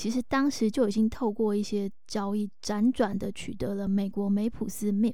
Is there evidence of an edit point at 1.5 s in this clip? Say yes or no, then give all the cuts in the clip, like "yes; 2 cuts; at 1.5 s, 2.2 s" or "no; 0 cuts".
no; 0 cuts